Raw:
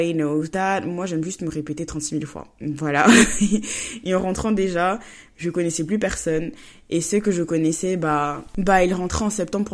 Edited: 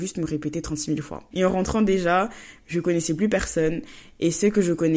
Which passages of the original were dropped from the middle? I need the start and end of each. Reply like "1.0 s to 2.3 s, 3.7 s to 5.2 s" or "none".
2.5 s to 4.0 s